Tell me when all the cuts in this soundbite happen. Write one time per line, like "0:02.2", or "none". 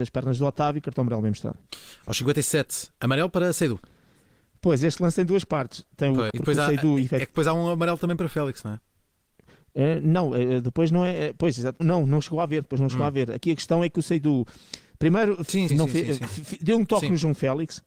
0:06.3
0:11.8
0:15.7